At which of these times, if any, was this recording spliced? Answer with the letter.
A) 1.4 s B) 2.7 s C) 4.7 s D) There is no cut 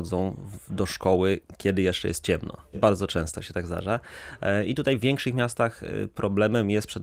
B